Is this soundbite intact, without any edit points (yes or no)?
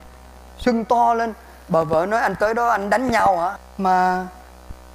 no